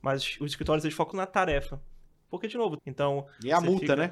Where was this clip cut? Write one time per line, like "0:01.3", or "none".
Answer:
0:01.1
0:02.8